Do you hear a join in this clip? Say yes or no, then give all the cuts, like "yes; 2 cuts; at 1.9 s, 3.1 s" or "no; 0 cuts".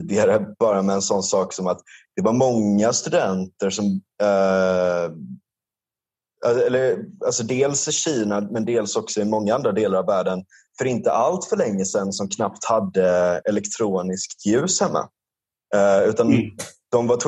no; 0 cuts